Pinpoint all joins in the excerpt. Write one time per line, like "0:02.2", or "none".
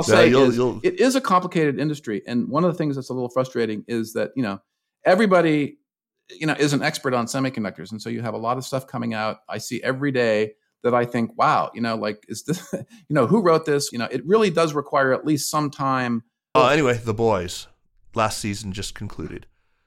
0:13.9
0:16.6